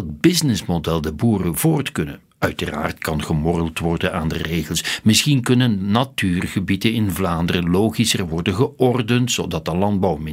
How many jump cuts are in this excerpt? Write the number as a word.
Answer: one